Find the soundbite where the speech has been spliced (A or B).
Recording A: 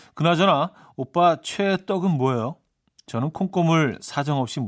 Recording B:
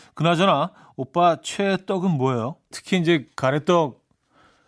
B